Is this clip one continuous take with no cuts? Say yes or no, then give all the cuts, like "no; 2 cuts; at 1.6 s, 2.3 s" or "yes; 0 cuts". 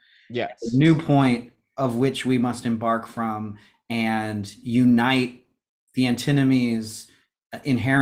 yes; 0 cuts